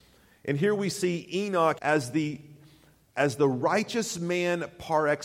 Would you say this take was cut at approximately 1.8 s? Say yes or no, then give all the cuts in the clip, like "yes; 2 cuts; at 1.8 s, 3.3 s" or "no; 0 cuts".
yes; 1 cut; at 1.8 s